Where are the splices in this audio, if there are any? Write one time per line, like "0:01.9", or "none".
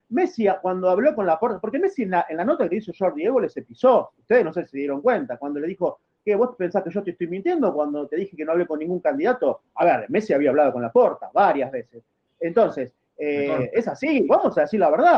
none

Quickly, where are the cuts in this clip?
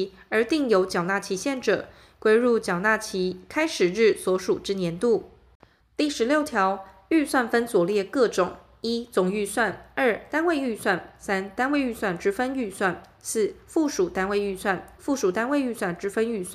0:05.8
0:15.0

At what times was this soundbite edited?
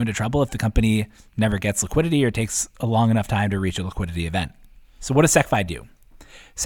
0:05.0

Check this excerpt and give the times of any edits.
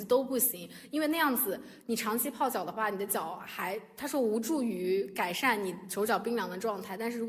none

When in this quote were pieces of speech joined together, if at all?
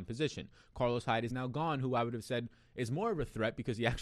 none

